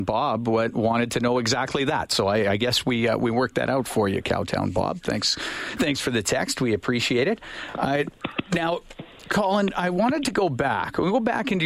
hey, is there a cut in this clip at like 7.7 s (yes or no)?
no